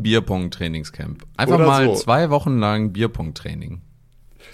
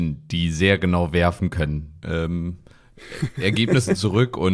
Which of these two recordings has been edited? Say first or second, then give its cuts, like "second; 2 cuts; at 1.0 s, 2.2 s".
second; 1 cut; at 2.0 s